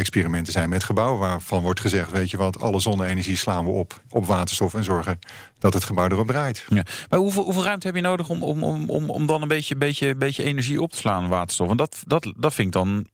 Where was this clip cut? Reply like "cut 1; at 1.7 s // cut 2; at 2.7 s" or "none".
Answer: none